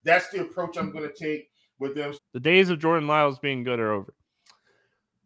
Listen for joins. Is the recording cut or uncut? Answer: cut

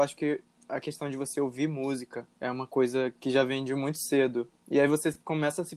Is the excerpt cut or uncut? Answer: cut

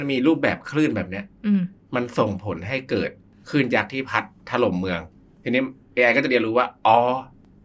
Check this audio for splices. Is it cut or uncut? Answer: uncut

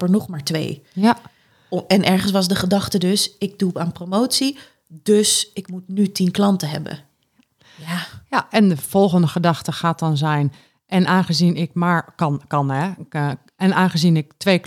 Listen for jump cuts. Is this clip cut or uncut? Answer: uncut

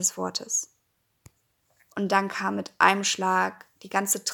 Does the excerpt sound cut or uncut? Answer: cut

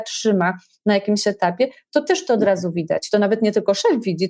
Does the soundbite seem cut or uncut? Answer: uncut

